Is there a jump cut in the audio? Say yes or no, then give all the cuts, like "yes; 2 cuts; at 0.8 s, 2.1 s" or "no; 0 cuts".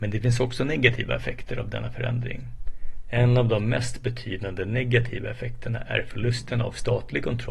no; 0 cuts